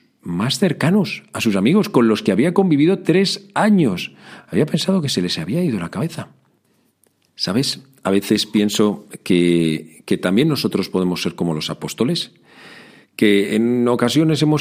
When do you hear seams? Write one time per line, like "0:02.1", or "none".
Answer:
none